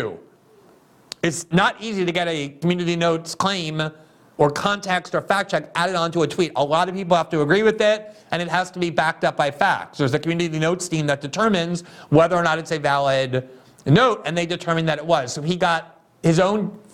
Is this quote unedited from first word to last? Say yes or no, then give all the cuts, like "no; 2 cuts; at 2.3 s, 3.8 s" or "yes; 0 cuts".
yes; 0 cuts